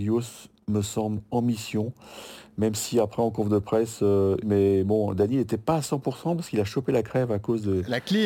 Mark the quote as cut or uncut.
cut